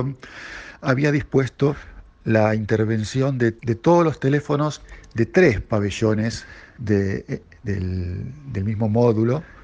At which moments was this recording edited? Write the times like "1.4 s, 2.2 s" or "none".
3.6 s